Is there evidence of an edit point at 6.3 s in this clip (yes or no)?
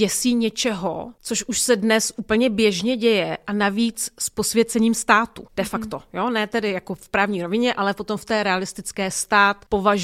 no